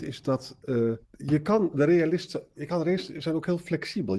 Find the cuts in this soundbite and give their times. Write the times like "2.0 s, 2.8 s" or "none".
1.0 s

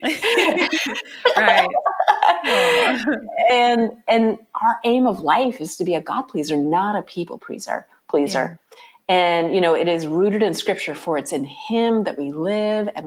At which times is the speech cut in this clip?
none

